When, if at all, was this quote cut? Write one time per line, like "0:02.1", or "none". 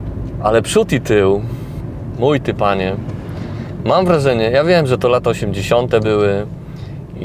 none